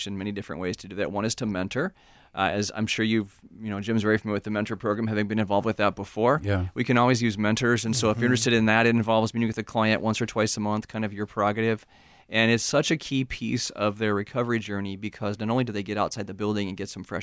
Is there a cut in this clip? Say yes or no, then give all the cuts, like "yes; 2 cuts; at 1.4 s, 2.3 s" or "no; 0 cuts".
no; 0 cuts